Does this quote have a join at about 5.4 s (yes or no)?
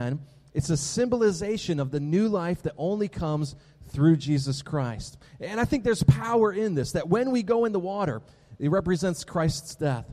no